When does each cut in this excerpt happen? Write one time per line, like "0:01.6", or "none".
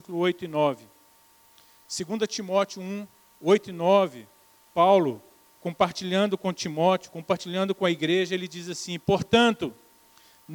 none